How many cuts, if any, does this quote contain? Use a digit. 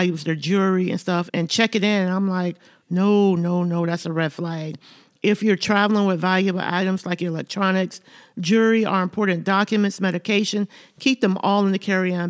1